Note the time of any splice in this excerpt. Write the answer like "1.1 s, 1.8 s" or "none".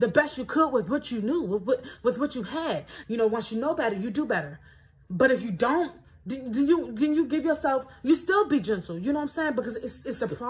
3.0 s